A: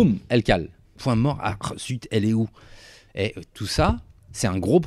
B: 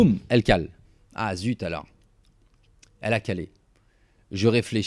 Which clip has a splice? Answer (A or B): A